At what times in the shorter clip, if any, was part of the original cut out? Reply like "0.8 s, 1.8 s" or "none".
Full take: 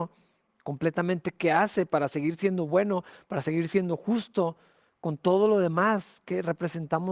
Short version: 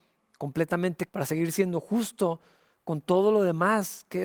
1.1 s

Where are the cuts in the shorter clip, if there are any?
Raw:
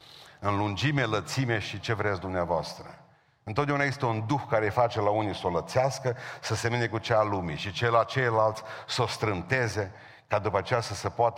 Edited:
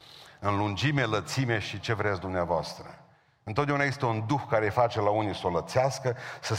none

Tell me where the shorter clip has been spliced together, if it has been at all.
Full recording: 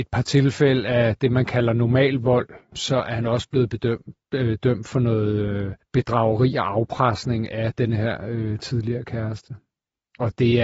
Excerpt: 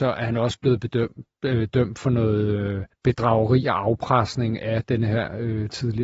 none

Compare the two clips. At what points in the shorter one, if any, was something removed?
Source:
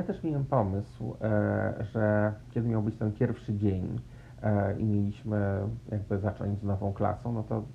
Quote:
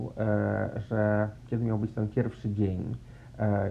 none

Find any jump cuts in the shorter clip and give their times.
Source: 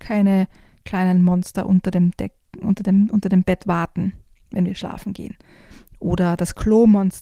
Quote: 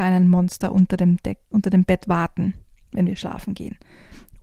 1.5 s

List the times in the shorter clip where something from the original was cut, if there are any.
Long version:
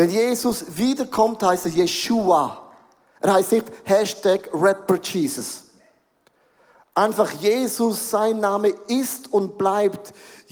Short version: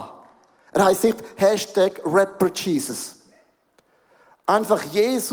none

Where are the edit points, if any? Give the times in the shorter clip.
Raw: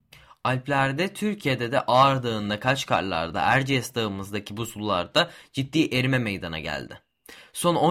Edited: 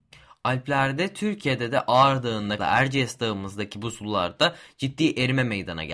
2.6 s

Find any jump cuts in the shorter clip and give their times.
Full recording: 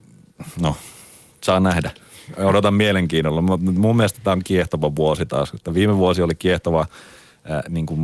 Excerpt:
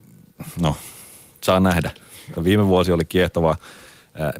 2.4 s

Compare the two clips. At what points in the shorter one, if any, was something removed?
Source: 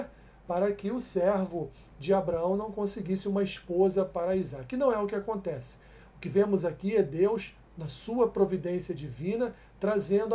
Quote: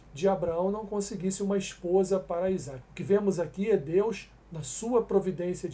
2.8 s

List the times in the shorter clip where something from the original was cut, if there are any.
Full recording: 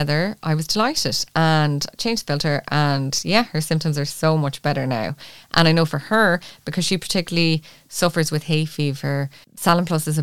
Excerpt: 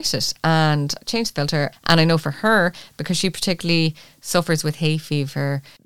1.7 s

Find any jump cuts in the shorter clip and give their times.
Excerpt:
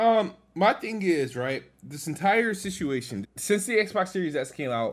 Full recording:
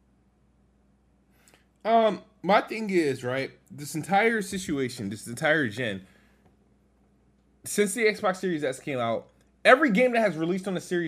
3.2 s

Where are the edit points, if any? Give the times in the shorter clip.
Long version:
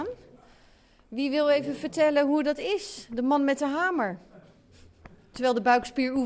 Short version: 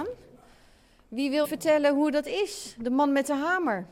1.4 s

